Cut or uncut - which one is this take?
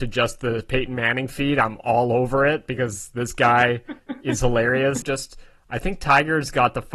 cut